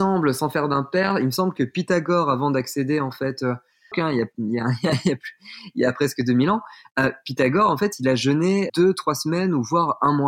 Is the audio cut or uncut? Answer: cut